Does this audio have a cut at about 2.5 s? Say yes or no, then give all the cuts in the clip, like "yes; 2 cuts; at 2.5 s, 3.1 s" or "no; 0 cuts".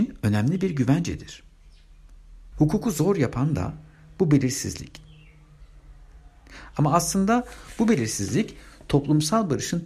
yes; 1 cut; at 2.5 s